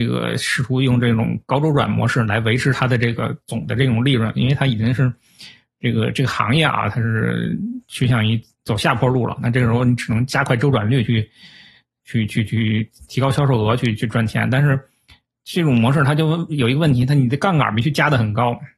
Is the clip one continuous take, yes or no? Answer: yes